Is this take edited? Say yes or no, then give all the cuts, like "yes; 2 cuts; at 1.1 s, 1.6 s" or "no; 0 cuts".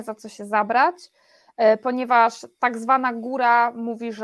no; 0 cuts